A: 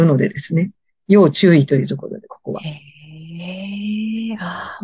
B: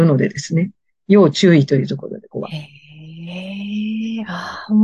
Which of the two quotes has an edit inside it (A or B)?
B